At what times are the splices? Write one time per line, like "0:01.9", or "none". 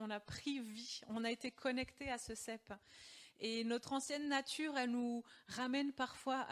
none

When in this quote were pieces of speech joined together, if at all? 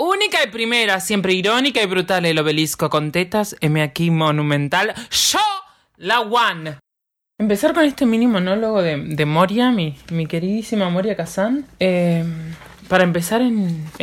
0:12.8

